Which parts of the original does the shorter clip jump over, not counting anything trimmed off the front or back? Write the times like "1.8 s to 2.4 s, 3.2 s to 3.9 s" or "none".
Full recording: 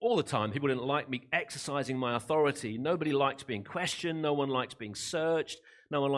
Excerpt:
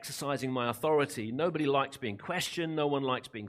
none